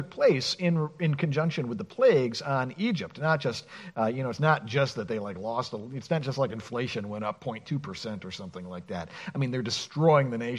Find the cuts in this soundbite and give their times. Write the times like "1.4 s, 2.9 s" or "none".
none